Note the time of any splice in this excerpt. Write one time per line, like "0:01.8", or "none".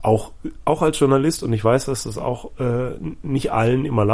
none